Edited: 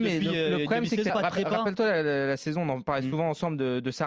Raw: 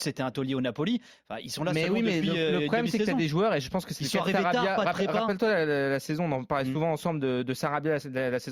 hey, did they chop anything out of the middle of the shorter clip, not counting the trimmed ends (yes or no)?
yes